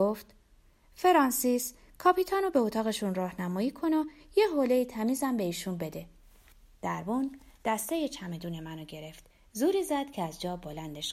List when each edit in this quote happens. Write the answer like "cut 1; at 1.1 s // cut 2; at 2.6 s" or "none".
none